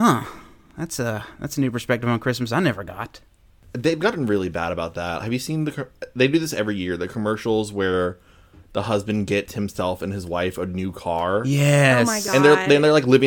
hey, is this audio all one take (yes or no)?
yes